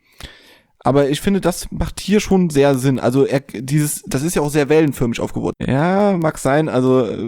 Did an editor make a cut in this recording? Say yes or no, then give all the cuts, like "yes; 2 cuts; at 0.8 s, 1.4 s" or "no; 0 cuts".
yes; 1 cut; at 5.5 s